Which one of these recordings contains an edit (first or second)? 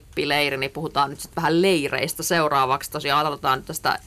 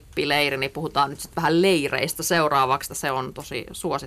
second